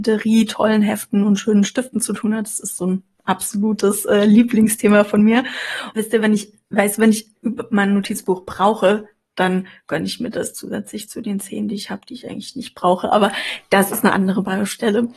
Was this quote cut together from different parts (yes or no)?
yes